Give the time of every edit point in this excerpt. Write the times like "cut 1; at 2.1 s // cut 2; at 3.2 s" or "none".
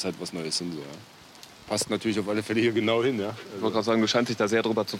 none